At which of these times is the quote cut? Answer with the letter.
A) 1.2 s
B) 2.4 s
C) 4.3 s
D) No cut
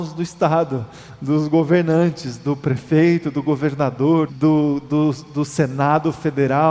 C